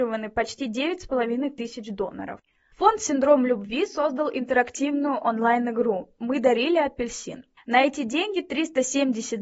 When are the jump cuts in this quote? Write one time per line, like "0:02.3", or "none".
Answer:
0:02.7
0:07.6